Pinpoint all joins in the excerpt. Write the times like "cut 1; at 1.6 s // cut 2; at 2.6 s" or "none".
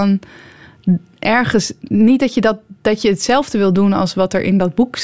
none